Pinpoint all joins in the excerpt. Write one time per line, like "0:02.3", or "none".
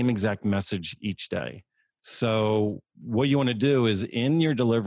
0:02.0